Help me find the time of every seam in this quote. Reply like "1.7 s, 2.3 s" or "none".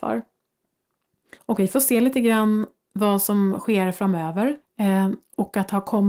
1.4 s, 4.6 s